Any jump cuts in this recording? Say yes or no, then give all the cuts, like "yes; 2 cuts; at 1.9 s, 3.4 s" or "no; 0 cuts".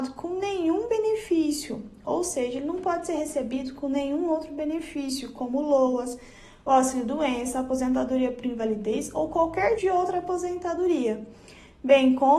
yes; 1 cut; at 9.8 s